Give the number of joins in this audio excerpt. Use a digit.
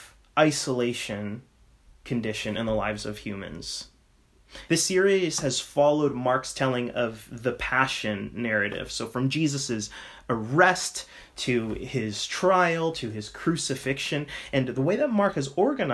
1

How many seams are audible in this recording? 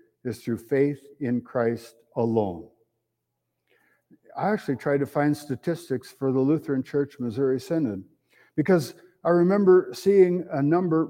0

